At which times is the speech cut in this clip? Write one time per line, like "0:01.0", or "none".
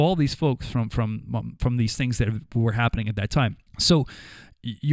0:03.7